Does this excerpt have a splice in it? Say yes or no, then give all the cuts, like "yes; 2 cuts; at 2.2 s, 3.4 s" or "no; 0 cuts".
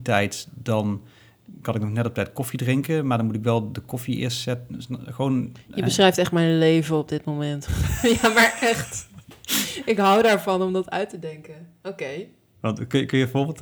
yes; 1 cut; at 7.7 s